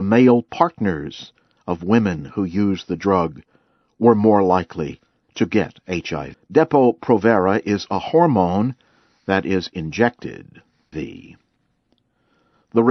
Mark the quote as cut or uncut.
cut